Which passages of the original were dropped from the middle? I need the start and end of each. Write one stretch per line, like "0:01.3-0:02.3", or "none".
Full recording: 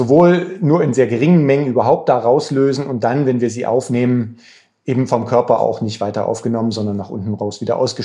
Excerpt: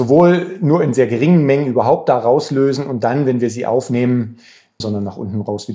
0:04.8-0:06.7